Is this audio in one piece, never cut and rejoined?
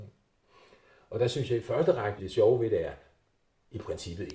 no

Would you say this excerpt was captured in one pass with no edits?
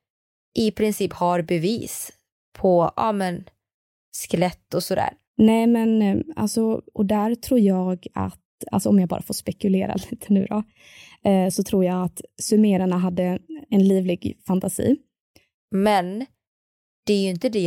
no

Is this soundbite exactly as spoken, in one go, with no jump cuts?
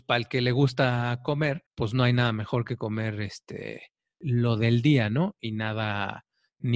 no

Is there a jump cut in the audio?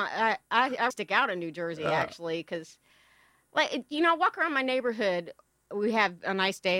yes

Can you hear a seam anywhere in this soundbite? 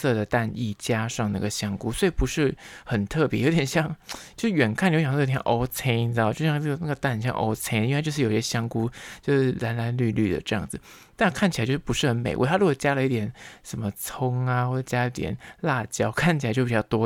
no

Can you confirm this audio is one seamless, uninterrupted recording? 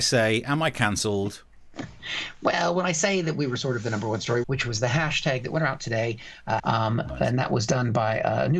no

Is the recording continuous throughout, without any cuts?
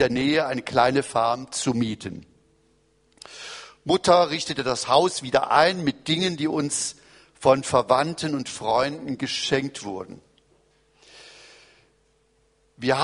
yes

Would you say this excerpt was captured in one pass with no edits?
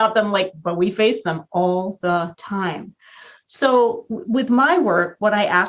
yes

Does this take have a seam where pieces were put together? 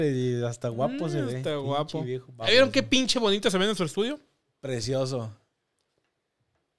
no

